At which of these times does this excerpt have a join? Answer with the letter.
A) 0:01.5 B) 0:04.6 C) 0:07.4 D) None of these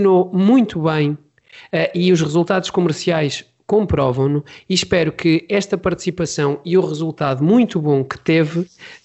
D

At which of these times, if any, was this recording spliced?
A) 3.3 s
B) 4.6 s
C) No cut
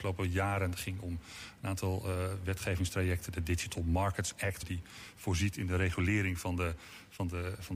B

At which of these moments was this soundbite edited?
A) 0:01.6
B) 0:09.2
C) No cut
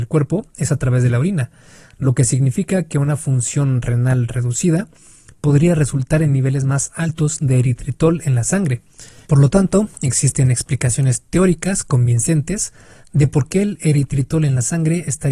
B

